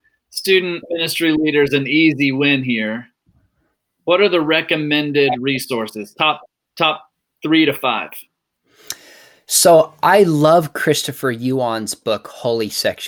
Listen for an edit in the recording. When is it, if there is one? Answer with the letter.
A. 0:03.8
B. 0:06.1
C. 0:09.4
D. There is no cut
D